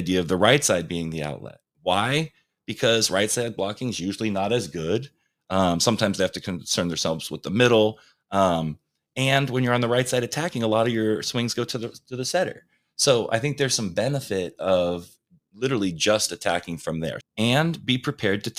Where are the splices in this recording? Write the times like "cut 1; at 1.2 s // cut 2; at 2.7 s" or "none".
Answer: cut 1; at 17.2 s